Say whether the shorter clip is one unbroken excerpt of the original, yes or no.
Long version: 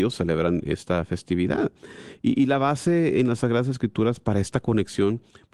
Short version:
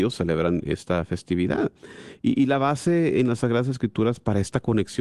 yes